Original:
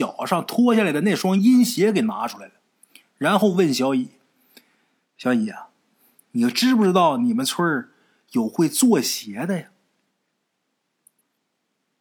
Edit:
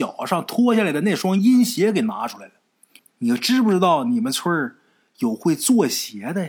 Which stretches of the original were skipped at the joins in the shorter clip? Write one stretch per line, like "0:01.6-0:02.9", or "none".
0:03.0-0:06.1

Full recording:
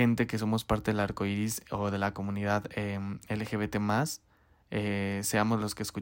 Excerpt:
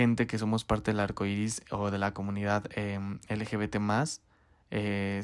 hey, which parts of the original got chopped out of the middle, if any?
none

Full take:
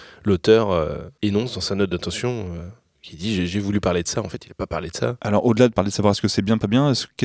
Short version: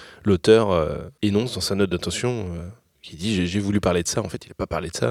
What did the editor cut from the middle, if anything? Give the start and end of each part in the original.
none

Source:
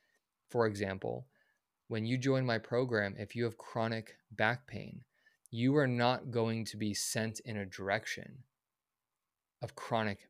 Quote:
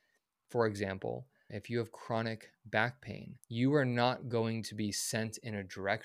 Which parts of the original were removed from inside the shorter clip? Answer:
0:01.5-0:03.2
0:05.1-0:05.4

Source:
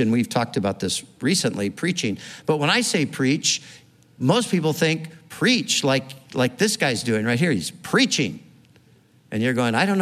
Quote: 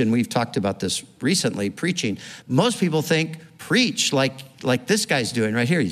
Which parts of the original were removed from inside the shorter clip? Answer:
0:02.4-0:04.1

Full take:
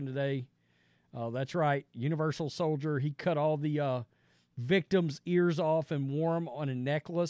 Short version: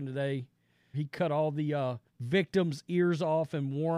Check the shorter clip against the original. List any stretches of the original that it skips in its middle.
0:00.9-0:03.0
0:04.1-0:04.4

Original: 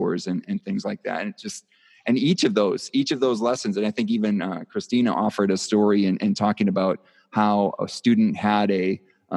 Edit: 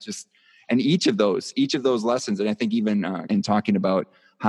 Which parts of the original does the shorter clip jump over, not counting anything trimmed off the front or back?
0:04.7-0:06.2

